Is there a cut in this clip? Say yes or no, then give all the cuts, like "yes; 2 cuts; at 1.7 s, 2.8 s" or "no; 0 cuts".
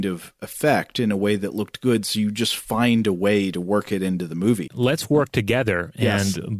yes; 1 cut; at 4.7 s